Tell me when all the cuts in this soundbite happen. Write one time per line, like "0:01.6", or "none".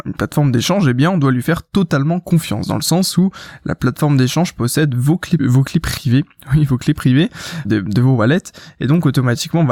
0:05.4
0:07.6